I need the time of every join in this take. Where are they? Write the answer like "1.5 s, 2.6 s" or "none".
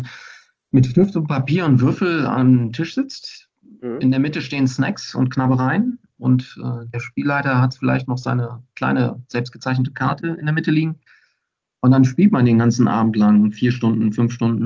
none